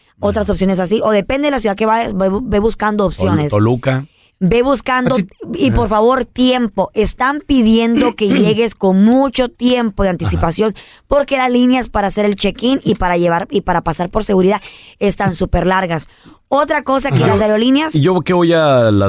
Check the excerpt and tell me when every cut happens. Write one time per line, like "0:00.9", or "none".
none